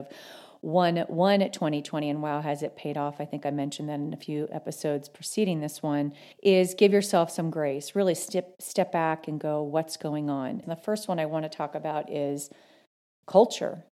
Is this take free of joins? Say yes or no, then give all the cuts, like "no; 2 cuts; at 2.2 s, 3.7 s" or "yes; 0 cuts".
no; 2 cuts; at 6.3 s, 10.6 s